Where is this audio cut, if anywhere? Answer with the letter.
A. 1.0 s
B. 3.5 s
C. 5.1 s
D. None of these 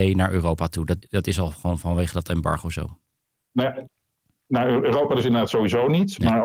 A